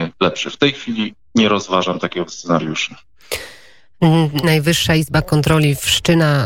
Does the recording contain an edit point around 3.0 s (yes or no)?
no